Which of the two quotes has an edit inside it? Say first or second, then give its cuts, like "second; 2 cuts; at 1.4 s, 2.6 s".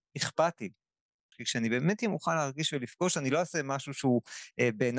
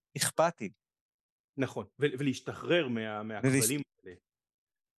first; 1 cut; at 1.3 s